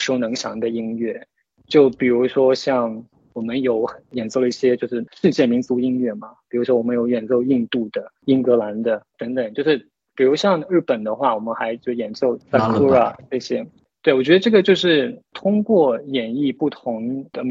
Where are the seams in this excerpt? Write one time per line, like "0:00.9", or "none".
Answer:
none